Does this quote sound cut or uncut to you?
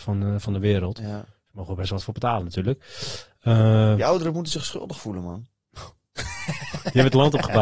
uncut